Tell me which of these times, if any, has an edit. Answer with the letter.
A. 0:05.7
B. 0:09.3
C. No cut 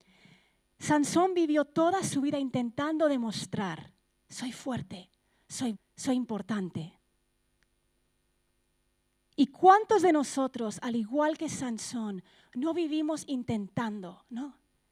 A